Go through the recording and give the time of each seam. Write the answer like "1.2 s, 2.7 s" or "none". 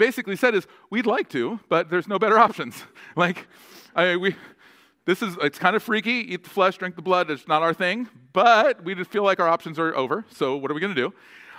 none